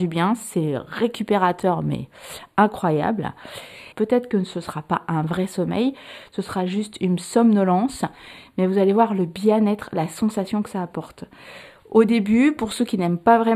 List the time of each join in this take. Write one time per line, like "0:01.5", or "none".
0:03.9